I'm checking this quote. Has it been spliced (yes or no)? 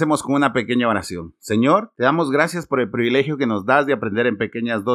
no